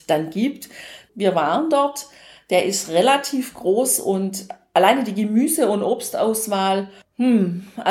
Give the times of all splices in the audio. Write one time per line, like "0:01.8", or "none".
0:01.1